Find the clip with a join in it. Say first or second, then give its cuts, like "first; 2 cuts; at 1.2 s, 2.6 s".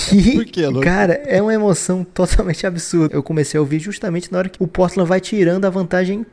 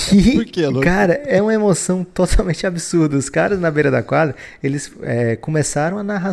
first; 2 cuts; at 3.1 s, 4.6 s